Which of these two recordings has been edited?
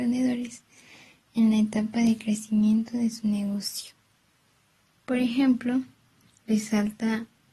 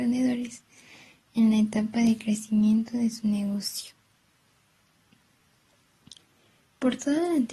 first; 1 cut; at 5.0 s

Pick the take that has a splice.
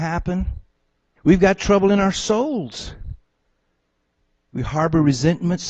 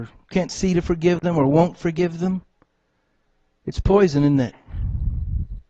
first; 1 cut; at 1.2 s

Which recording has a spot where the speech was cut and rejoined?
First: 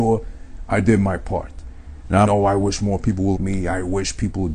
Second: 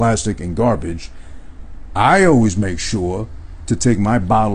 first; 2 cuts; at 2.3 s, 3.4 s

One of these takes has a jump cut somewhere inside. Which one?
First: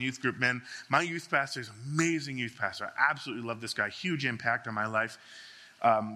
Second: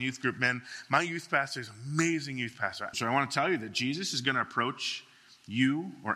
second; 1 cut; at 2.9 s

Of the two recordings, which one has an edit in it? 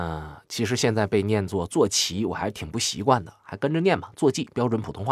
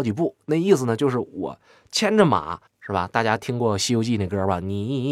second; 1 cut; at 2.7 s

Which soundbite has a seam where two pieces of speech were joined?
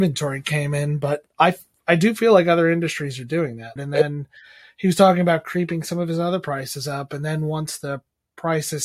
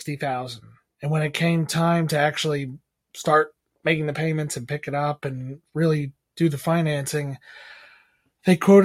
first; 1 cut; at 3.8 s

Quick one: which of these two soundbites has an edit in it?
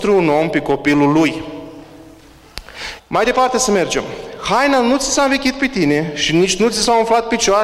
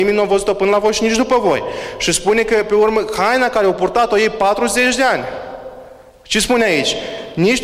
first; 1 cut; at 3.0 s

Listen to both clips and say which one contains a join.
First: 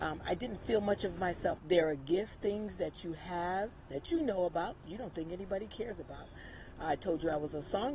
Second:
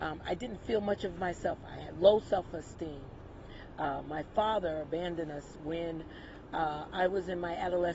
first; 1 cut; at 1.6 s

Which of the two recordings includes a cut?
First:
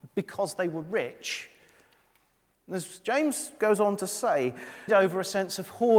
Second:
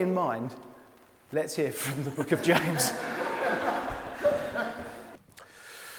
first; 2 cuts; at 2.5 s, 4.9 s

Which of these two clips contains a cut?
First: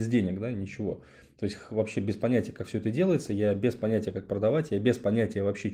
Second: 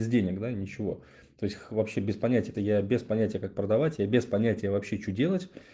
second; 1 cut; at 2.5 s

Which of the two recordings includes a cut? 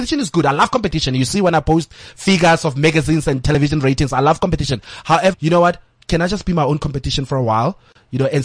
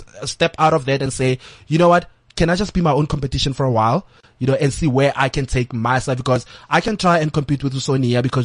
first; 1 cut; at 5.3 s

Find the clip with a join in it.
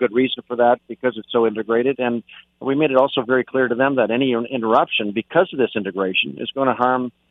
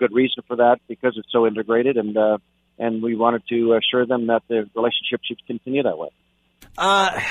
first; 1 cut; at 1.9 s

